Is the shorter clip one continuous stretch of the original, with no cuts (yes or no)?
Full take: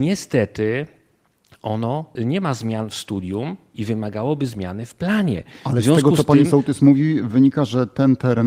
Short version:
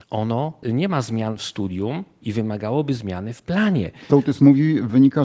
no